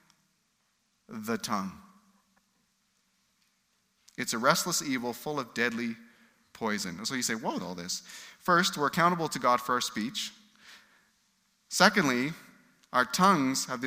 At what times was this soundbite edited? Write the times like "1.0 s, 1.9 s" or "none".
7.6 s